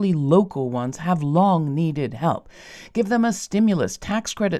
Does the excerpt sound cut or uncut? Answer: uncut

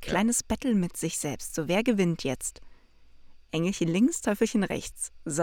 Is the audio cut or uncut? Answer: uncut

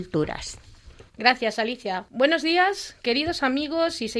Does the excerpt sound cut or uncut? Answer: cut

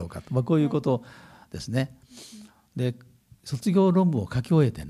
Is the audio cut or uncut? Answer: cut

